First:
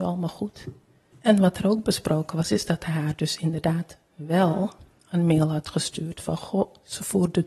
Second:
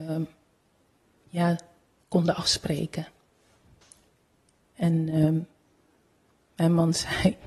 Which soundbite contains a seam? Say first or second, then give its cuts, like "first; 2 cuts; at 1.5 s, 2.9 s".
first; 1 cut; at 1.1 s